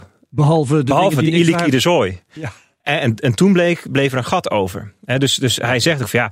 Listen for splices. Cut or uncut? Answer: uncut